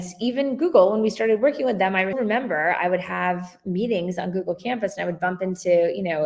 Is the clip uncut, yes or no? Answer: no